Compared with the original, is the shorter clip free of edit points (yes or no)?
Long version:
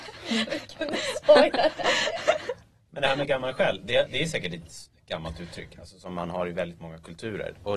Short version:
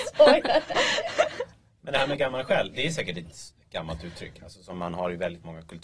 no